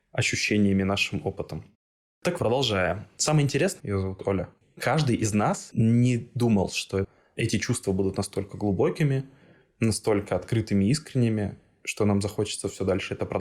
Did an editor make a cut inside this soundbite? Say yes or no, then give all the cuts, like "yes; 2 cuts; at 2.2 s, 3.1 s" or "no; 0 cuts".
yes; 2 cuts; at 2.4 s, 3.8 s